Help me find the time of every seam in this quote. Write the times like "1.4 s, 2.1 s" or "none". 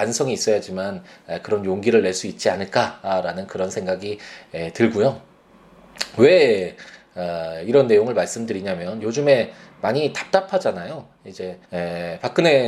11.6 s